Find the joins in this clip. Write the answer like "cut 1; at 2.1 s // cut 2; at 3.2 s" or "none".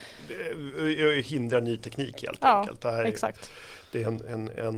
none